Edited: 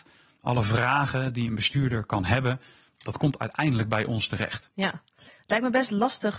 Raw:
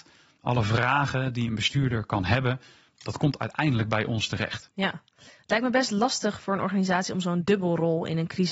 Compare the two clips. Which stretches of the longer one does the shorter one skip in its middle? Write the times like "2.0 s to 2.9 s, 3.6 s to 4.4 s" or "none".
none